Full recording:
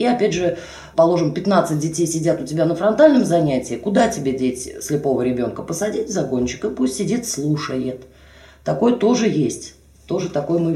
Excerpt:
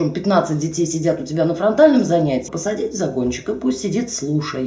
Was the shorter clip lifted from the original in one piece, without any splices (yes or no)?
no